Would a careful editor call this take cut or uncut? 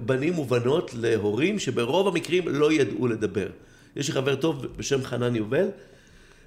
uncut